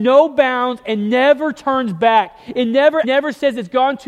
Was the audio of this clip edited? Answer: yes; 1 cut; at 3.0 s

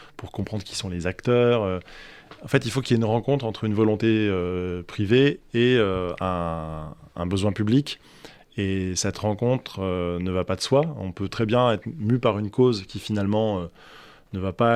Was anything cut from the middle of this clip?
no; 0 cuts

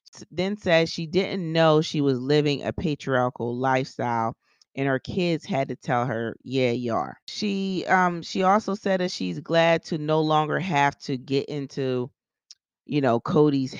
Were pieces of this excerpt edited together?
no; 0 cuts

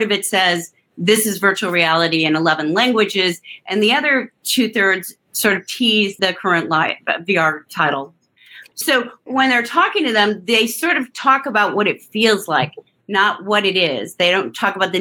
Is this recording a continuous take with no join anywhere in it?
yes; 0 cuts

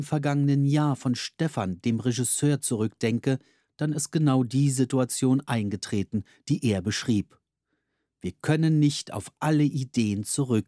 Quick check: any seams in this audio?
no; 0 cuts

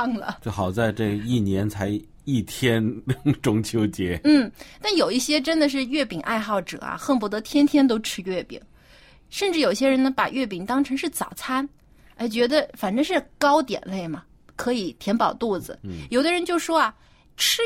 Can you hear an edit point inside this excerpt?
yes; 1 cut; at 15.8 s

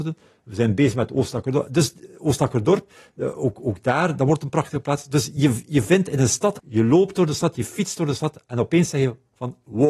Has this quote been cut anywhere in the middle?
yes; 1 cut; at 6.6 s

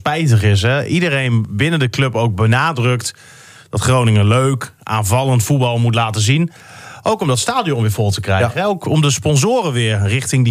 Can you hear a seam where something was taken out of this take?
no; 0 cuts

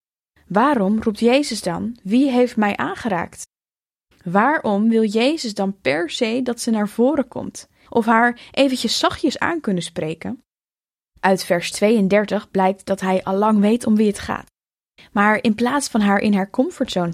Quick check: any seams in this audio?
yes; 1 cut; at 7.9 s

